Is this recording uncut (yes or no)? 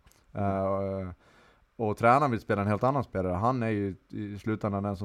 yes